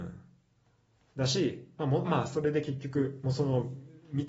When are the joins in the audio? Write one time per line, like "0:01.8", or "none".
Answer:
0:02.0